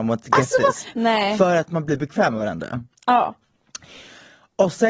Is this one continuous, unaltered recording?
no; 1 cut; at 0.9 s

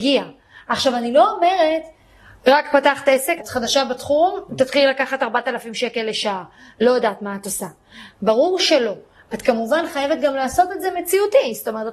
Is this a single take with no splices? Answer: no; 1 cut; at 3.4 s

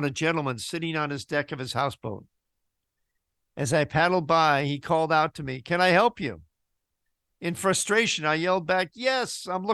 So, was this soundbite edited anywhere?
no; 0 cuts

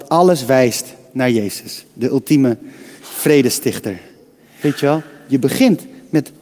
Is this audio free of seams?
no; 1 cut; at 4.6 s

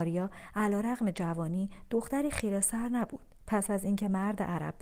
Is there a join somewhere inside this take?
no; 0 cuts

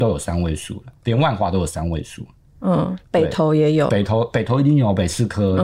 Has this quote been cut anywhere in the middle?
no; 0 cuts

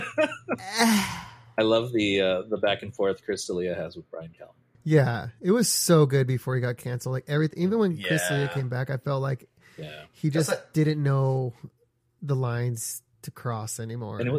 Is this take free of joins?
yes; 0 cuts

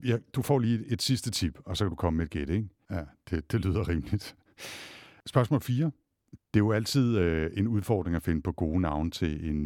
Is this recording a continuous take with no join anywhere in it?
no; 2 cuts; at 2.8 s, 6.4 s

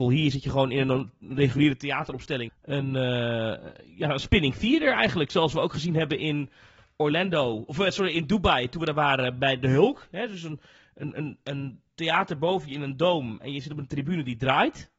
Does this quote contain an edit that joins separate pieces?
yes; 1 cut; at 2.5 s

